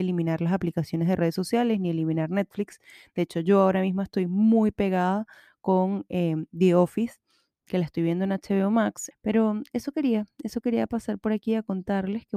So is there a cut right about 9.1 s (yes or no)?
yes